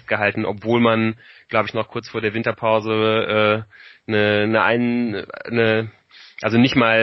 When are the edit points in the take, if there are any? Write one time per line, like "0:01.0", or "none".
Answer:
none